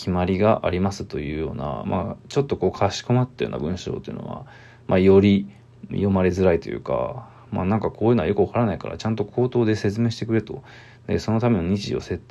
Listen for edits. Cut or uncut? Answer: uncut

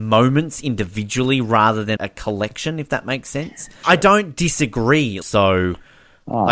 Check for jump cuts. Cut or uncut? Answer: cut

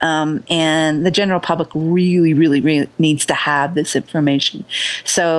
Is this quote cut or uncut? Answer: uncut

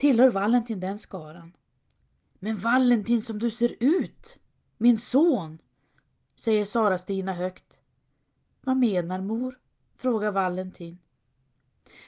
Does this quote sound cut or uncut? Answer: cut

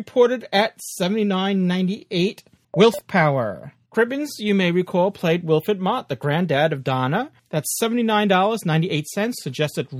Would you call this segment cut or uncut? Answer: cut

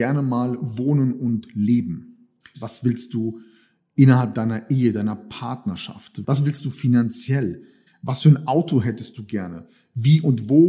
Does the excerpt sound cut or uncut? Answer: cut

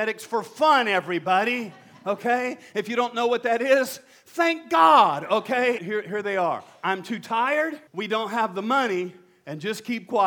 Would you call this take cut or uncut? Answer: cut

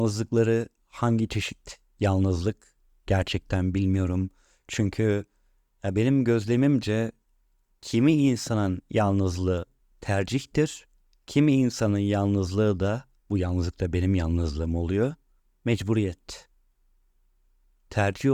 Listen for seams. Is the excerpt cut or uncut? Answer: uncut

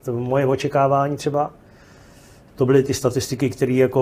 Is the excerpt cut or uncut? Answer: cut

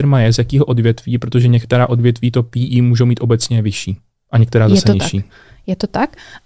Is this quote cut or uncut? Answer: uncut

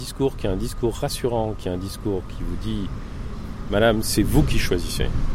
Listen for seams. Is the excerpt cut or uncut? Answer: uncut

